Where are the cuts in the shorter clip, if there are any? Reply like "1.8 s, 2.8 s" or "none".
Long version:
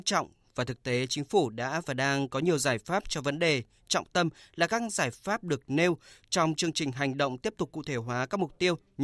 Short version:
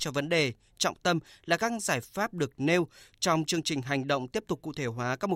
none